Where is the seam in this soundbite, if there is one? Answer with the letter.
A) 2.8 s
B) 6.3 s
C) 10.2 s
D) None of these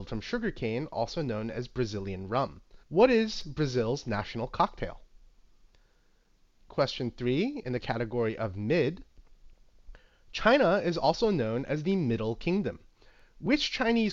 A